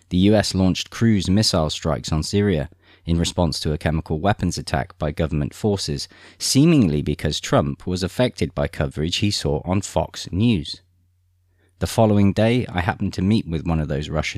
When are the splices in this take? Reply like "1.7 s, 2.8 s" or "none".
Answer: none